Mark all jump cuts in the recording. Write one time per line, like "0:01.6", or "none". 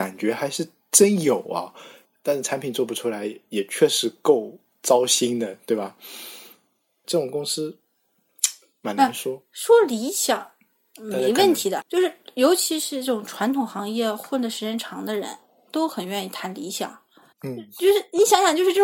0:07.0
0:11.8